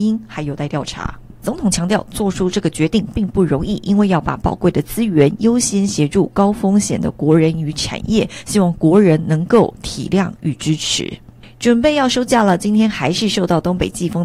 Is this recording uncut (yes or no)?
no